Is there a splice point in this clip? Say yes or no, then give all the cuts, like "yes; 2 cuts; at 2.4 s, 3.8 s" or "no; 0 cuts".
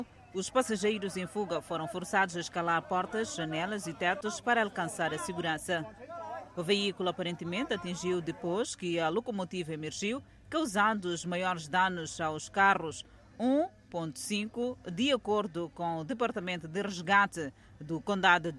no; 0 cuts